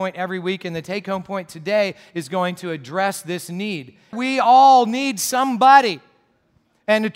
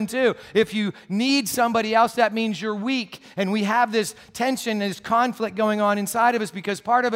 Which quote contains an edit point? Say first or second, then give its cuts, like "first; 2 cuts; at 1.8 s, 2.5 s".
first; 1 cut; at 4.1 s